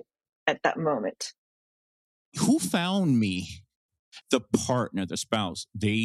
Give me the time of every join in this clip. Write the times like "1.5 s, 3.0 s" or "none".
2.2 s, 4.2 s